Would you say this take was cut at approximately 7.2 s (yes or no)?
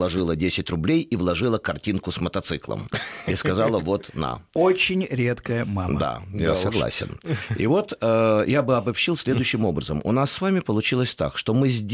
no